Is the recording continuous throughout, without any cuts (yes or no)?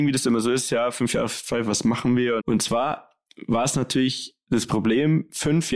no